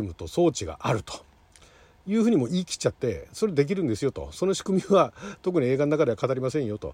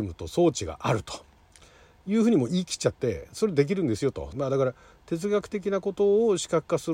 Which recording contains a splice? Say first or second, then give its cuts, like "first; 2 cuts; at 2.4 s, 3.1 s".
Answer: second; 1 cut; at 4.3 s